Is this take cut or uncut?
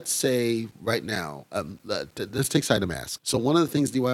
cut